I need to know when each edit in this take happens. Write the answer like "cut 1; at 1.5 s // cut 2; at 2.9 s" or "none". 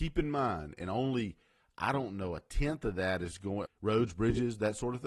cut 1; at 3.7 s